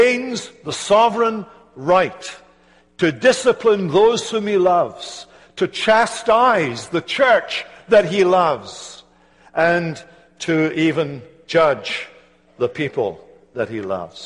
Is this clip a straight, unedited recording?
yes; 0 cuts

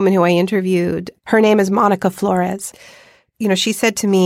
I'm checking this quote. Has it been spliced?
no; 0 cuts

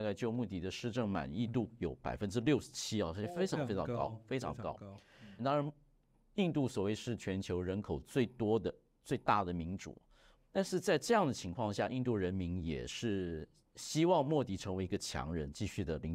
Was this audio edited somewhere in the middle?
yes; 2 cuts; at 5.4 s, 10.3 s

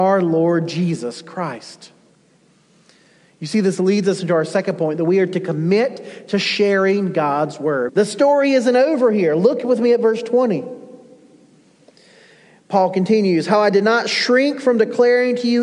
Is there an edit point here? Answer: yes; 1 cut; at 7.9 s

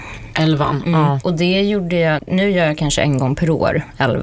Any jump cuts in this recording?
yes; 1 cut; at 2.2 s

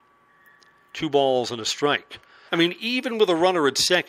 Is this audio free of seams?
no; 1 cut; at 2.5 s

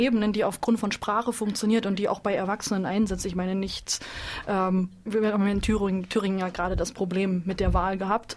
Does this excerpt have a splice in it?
yes; 1 cut; at 5.1 s

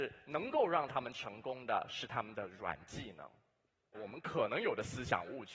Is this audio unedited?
no; 1 cut; at 3.9 s

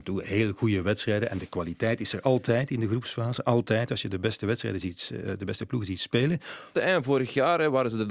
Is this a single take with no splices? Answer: no; 1 cut; at 6.8 s

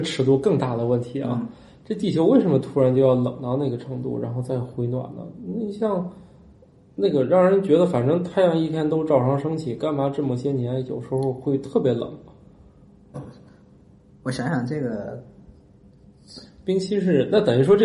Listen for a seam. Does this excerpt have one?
yes; 1 cut; at 13.1 s

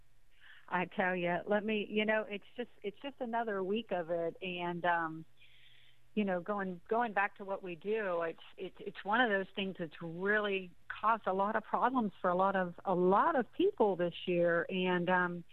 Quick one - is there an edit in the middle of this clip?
no; 0 cuts

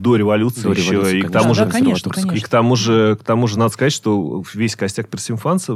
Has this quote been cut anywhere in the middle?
no; 0 cuts

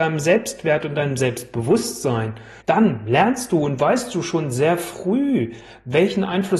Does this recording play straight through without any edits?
no; 1 cut; at 2.6 s

